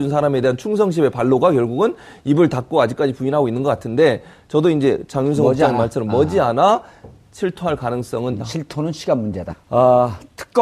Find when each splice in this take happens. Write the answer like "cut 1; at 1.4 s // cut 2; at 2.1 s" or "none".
cut 1; at 8.4 s // cut 2; at 9.5 s

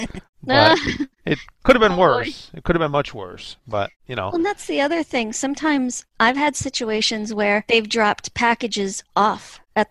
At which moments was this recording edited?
cut 1; at 4.0 s

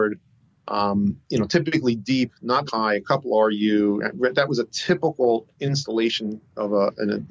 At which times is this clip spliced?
cut 1; at 2.7 s

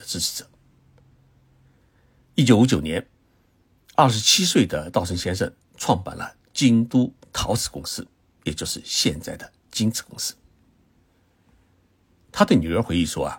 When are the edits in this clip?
none

